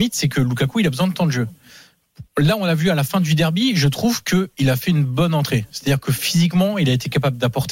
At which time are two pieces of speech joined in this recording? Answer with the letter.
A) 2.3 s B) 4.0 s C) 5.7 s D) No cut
D